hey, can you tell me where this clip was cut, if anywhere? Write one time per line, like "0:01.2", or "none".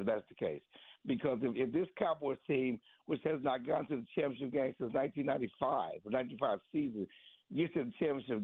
none